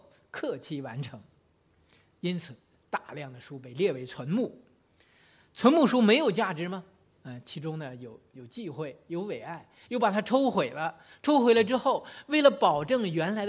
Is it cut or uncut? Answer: cut